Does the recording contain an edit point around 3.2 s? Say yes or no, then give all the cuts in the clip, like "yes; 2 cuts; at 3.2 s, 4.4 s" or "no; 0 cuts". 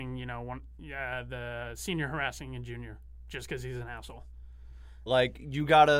no; 1 cut; at 5.1 s